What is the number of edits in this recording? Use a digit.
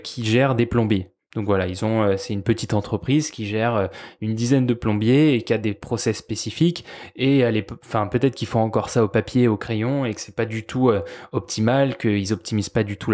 0